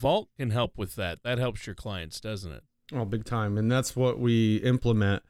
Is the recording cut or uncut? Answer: uncut